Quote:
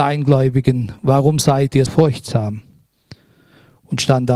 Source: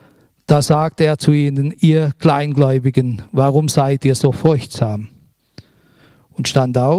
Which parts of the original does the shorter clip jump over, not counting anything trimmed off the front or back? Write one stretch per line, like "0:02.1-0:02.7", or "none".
0:04.2-0:04.3